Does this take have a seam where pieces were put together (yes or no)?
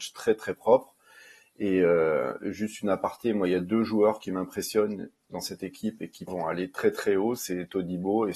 yes